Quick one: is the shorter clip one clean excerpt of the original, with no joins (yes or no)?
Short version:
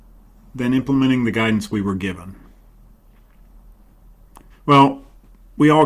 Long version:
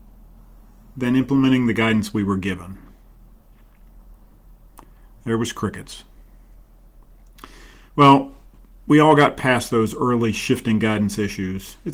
no